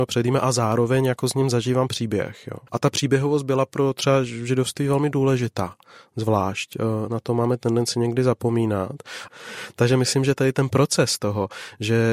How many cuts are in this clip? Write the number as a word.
two